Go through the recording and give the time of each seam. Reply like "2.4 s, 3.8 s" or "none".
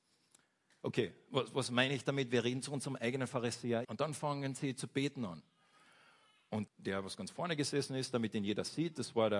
3.8 s, 6.7 s